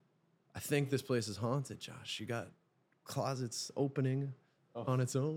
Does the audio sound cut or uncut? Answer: uncut